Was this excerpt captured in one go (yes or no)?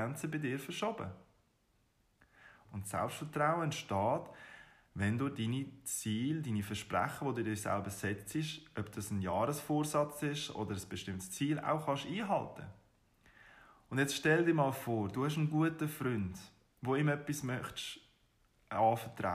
no